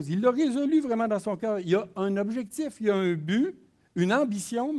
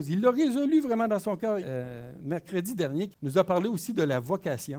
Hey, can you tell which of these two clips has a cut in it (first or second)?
second